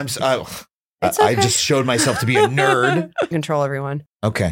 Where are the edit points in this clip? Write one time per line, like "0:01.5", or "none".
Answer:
0:03.3